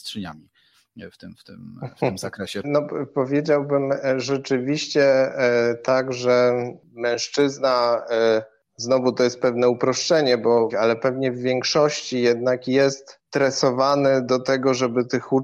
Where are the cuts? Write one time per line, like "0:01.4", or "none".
0:02.6
0:10.7
0:13.3